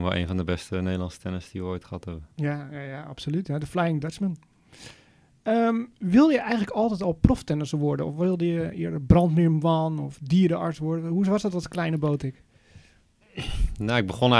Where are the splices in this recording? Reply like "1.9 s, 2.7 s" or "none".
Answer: none